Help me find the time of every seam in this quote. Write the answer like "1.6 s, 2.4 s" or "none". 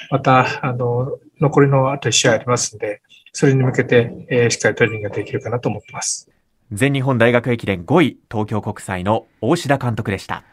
none